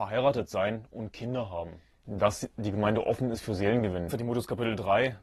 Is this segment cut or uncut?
cut